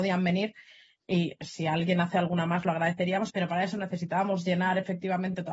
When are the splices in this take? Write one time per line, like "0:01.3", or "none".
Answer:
0:03.3